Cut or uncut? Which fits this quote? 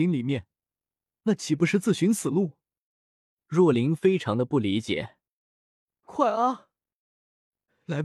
uncut